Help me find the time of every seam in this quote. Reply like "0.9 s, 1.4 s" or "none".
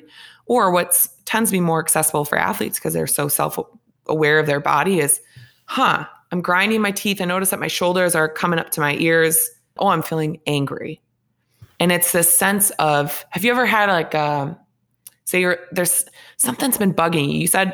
9.8 s